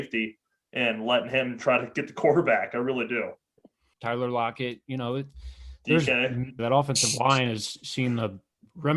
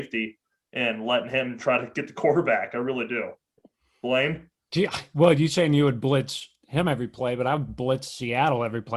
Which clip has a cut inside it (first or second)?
first